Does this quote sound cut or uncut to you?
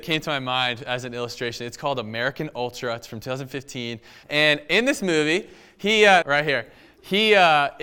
cut